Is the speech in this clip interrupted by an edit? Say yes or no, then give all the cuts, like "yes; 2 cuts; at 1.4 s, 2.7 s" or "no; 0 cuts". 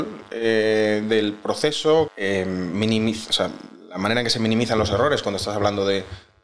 yes; 1 cut; at 2.1 s